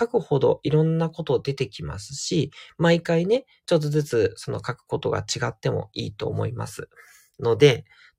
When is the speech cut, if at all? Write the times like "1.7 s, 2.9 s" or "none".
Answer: none